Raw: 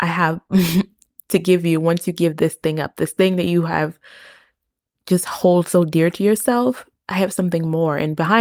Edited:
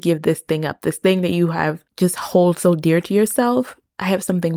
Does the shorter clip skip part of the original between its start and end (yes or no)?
yes